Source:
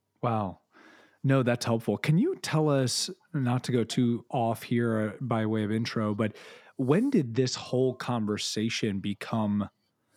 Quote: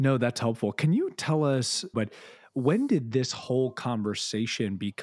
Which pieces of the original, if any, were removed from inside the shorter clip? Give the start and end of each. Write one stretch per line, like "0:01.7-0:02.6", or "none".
0:03.2-0:06.2